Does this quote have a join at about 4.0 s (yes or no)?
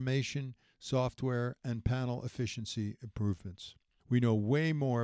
yes